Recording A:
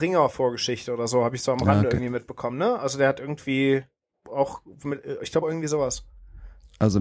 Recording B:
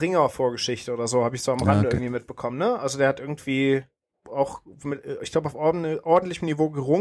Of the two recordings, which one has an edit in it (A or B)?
A